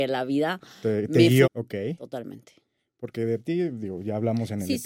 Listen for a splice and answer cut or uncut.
cut